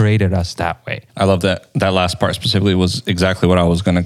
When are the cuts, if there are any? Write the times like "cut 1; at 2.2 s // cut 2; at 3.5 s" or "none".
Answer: cut 1; at 1.1 s